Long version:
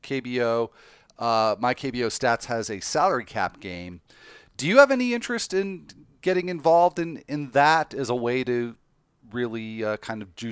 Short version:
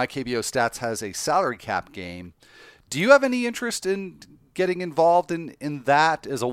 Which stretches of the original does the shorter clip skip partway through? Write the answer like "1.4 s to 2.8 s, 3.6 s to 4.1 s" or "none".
none